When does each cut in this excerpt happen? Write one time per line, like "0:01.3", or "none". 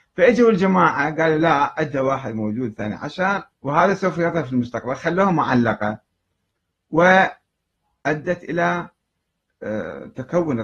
0:03.5